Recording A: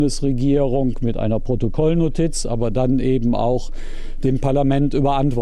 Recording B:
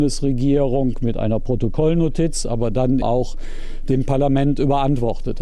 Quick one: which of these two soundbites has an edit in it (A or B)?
B